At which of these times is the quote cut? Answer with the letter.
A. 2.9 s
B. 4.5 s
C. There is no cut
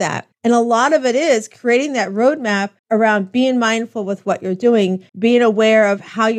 C